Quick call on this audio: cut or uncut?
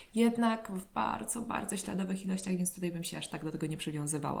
uncut